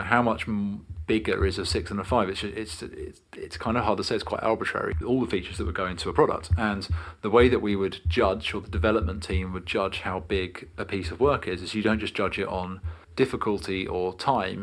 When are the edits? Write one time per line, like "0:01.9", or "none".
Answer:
0:05.0
0:13.0